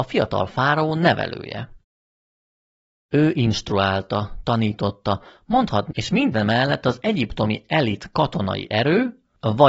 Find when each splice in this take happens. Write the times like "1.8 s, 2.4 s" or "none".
5.9 s